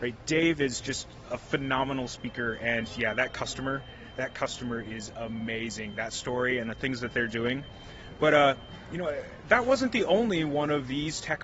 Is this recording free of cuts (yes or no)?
yes